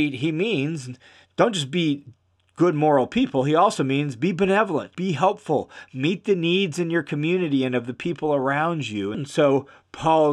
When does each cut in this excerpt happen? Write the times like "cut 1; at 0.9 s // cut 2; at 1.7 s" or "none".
cut 1; at 4.9 s // cut 2; at 9.1 s